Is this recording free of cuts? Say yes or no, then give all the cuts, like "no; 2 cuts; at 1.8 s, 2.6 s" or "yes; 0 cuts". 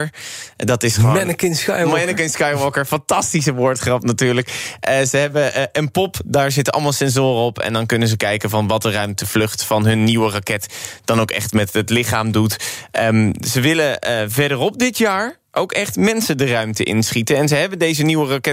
yes; 0 cuts